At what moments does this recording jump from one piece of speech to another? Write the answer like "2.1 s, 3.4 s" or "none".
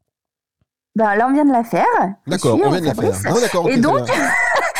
none